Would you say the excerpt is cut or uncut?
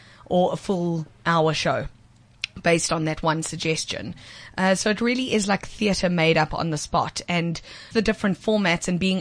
cut